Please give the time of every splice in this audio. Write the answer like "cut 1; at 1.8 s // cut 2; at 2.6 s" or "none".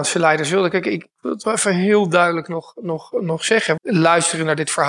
cut 1; at 3.8 s